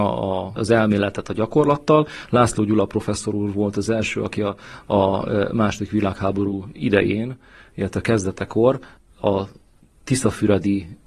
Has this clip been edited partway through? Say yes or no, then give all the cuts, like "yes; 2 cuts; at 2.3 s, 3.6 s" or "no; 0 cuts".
no; 0 cuts